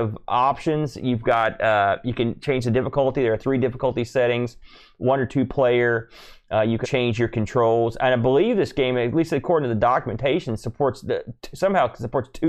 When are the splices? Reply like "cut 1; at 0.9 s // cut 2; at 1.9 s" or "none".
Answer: cut 1; at 6.8 s